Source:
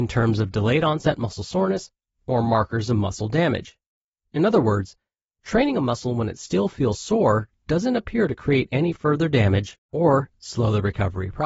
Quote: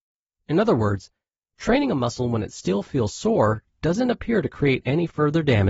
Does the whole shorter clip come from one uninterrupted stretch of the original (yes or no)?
yes